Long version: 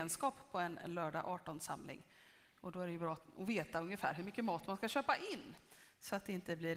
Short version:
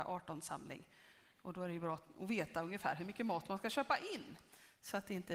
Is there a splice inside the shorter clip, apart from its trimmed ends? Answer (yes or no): no